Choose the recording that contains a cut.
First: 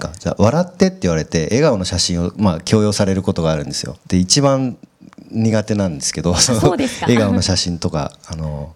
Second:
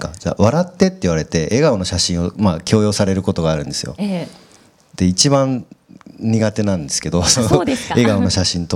first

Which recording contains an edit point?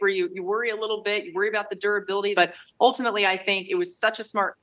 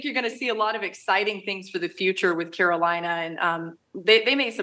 first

